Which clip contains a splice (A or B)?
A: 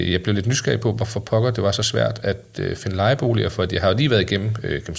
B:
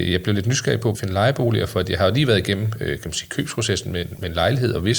B